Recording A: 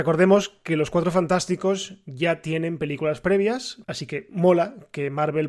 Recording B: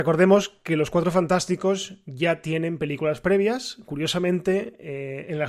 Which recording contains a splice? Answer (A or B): A